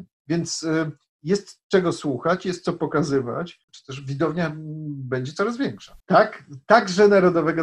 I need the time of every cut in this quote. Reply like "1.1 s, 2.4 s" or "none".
3.7 s, 6.0 s